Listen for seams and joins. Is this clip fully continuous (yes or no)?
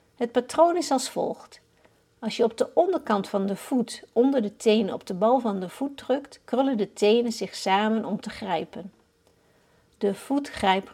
yes